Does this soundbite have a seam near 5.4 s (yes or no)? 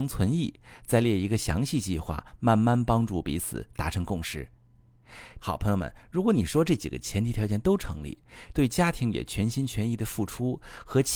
yes